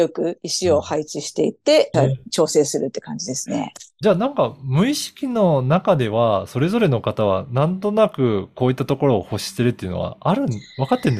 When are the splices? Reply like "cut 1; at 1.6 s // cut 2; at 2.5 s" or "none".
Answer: cut 1; at 1.9 s